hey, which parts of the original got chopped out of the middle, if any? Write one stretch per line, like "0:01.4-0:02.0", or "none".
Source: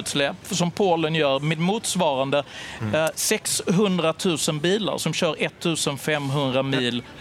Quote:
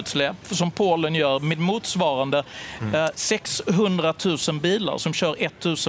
none